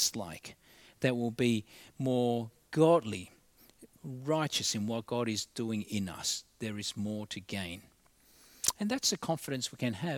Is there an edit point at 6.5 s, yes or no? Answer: no